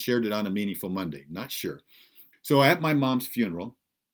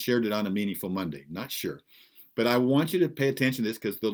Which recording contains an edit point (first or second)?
first